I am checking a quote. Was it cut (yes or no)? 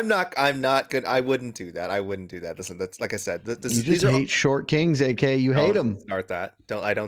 no